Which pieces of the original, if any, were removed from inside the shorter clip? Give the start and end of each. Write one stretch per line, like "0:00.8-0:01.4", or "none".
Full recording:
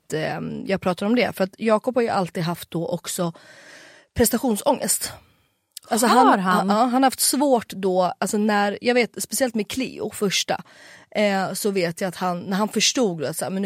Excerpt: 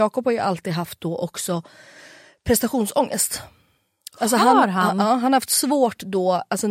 none